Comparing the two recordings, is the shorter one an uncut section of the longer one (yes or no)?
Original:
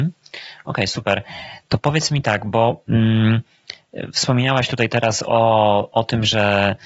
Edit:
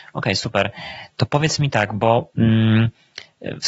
yes